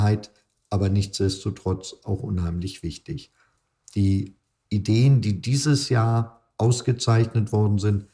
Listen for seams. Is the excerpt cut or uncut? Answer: uncut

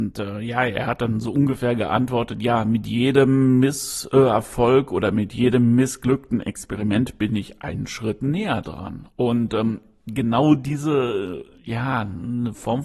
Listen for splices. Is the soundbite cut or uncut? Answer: uncut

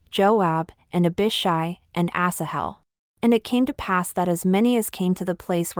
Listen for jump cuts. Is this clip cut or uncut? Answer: cut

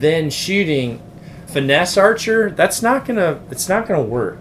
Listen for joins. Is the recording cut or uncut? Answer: cut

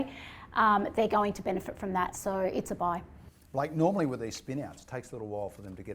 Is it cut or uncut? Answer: cut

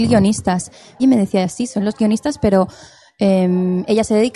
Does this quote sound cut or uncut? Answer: cut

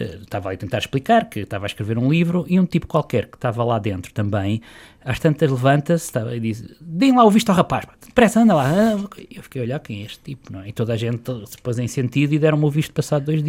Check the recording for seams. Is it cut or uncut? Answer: uncut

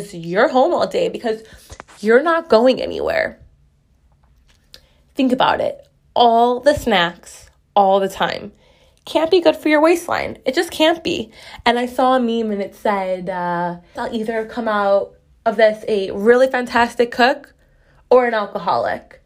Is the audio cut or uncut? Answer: cut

